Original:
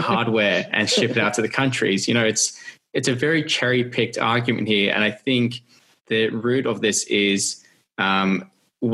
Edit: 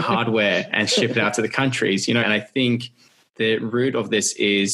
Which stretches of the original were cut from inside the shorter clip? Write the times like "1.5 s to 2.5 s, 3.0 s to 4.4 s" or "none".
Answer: 2.2 s to 4.9 s

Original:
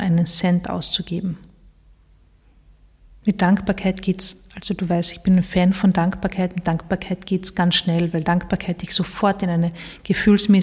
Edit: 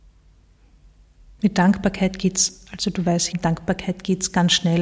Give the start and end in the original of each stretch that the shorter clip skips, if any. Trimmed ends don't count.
5.1 s to 6.5 s

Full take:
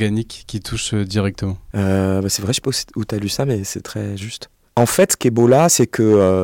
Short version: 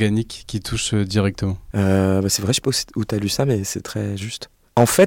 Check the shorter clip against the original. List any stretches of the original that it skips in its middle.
none

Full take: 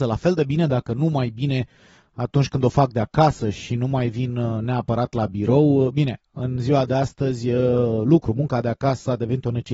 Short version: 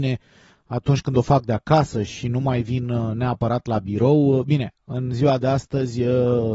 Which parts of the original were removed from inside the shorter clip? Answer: none

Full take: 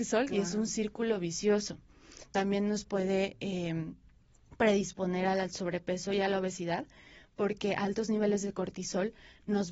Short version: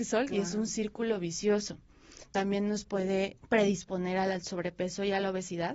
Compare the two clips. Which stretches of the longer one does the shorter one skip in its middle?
3.4 s to 4.4 s

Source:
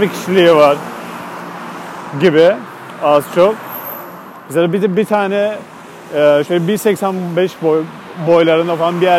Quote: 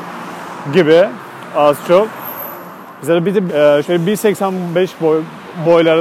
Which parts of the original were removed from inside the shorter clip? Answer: 4.9 s to 6.1 s

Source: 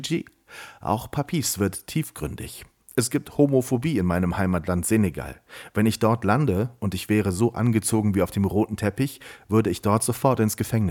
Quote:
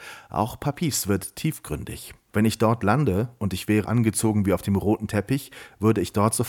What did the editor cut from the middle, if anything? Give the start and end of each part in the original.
2.8 s to 5.7 s, 7.2 s to 7.5 s

